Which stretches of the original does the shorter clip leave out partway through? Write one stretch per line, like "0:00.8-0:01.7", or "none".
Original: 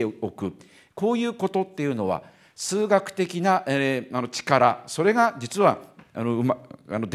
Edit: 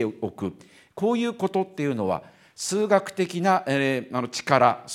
none